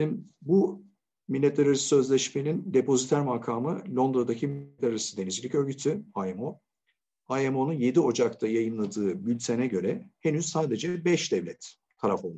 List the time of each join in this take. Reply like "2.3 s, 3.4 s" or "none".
none

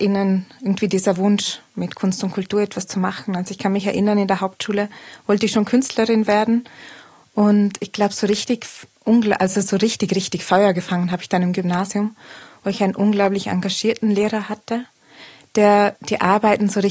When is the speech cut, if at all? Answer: none

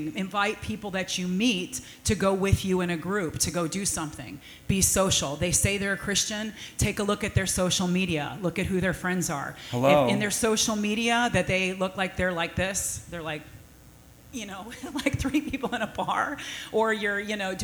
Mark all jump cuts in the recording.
none

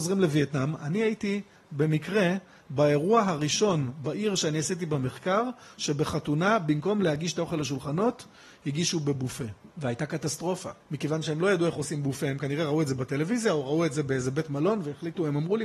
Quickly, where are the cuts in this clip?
none

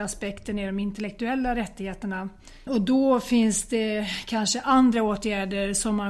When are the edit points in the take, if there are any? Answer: 2.7 s

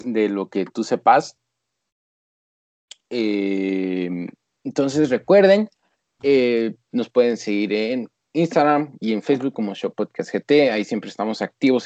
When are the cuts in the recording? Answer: none

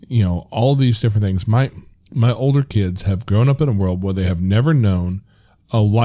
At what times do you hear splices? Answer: none

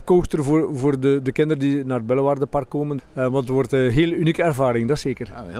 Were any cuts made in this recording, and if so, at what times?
3.0 s

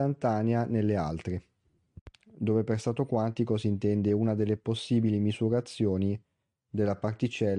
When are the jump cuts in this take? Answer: none

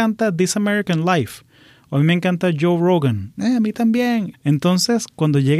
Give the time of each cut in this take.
4.3 s

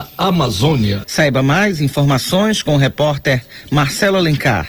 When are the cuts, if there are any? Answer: 1.0 s

